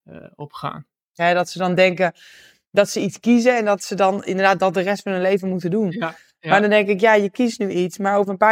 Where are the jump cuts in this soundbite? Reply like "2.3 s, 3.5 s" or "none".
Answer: 1.2 s

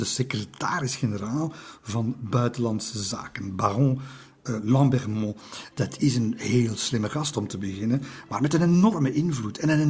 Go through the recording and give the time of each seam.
5.7 s

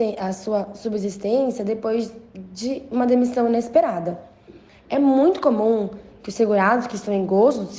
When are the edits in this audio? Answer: 4.7 s

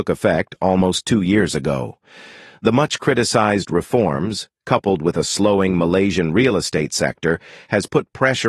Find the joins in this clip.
none

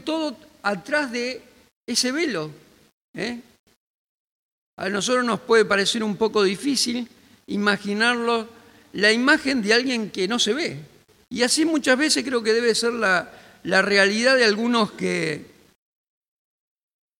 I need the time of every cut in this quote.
4.5 s, 11.2 s

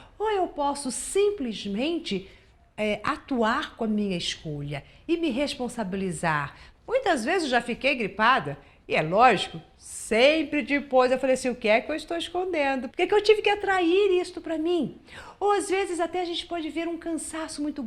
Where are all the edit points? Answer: 6.7 s, 12.9 s

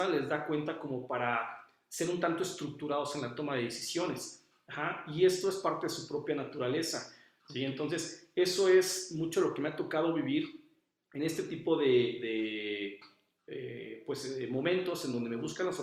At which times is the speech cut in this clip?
7.4 s

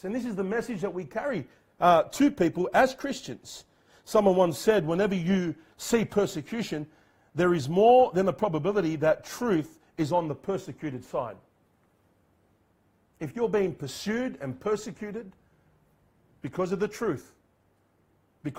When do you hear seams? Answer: none

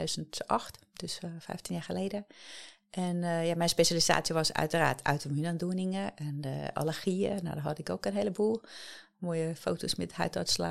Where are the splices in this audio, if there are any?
none

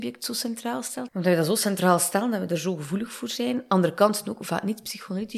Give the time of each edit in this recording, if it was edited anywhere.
1.1 s

